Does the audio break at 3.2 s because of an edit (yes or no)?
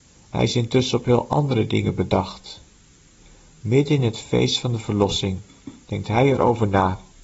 no